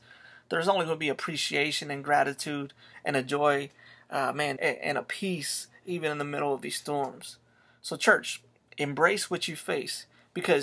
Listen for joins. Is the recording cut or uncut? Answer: cut